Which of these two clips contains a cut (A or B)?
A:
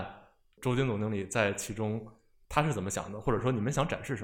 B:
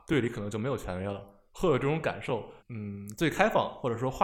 B